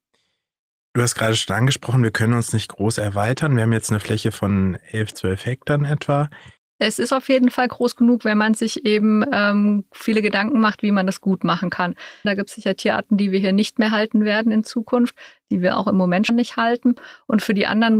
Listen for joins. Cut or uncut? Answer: cut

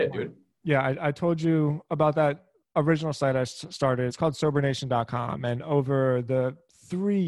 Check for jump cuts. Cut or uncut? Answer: uncut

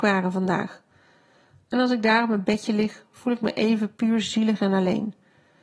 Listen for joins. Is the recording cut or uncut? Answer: uncut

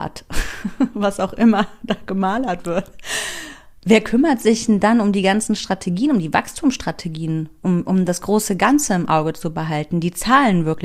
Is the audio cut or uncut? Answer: uncut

